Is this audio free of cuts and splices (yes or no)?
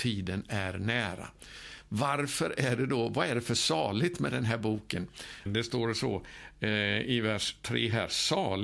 no